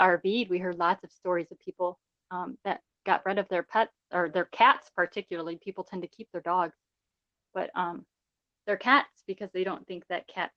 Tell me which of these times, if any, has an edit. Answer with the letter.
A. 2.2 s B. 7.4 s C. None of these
C